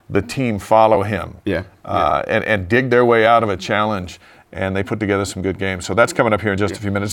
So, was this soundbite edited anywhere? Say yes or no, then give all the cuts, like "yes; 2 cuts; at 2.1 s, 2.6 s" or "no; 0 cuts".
no; 0 cuts